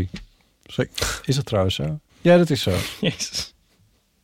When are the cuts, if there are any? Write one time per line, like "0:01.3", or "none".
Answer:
0:02.1

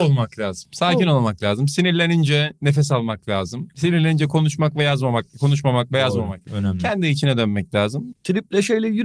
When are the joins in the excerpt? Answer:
0:06.5
0:08.1

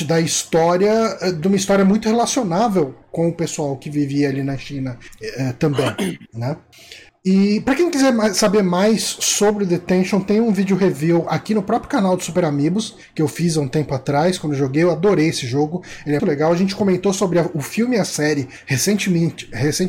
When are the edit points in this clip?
0:16.2

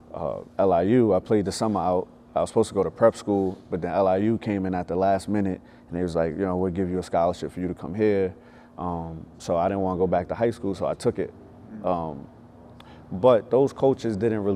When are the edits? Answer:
none

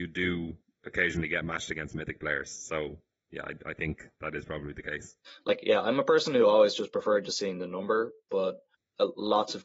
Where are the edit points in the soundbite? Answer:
none

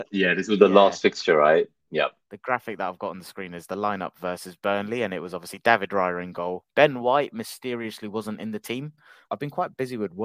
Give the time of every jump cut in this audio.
0:09.3

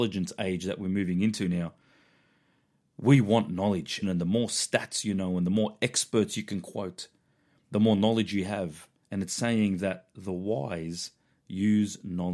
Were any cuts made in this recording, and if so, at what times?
0:04.0
0:09.0

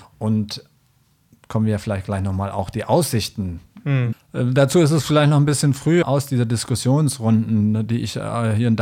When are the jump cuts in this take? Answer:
0:04.1
0:06.0

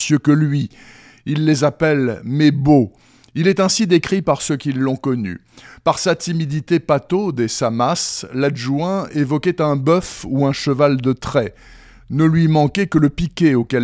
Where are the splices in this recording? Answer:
none

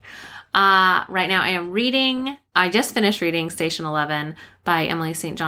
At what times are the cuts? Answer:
none

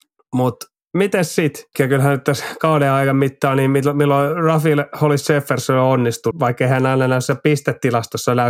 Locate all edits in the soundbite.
0:01.7
0:06.3

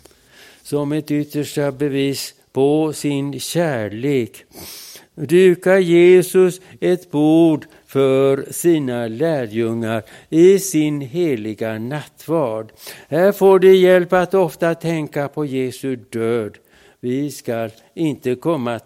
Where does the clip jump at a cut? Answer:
none

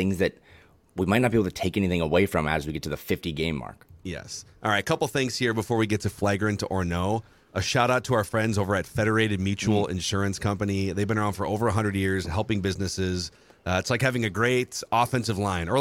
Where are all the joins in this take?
none

